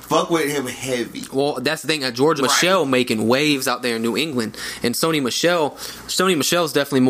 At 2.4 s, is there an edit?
yes; 1 cut; at 2.4 s

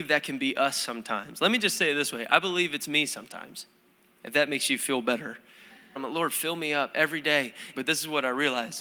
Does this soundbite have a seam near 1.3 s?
no; 2 cuts; at 6.0 s, 7.7 s

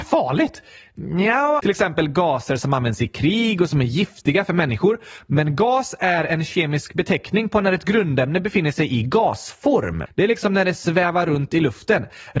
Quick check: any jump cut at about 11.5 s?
no; 2 cuts; at 1.6 s, 10.1 s

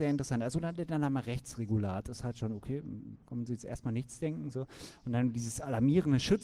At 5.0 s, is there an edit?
no; 1 cut; at 3.2 s

